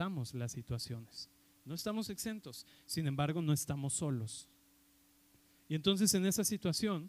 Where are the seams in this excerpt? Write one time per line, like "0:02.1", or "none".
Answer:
none